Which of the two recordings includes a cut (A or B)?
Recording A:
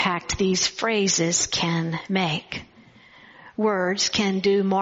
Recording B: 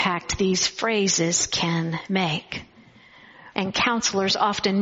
B